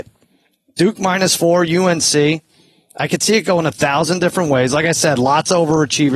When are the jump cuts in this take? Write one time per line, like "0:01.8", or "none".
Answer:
none